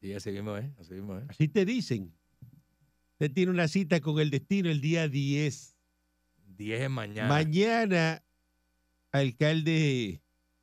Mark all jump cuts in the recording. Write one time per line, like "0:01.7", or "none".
none